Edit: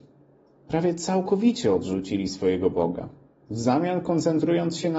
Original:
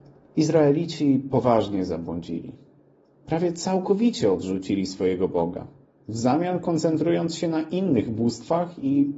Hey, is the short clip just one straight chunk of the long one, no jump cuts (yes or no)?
yes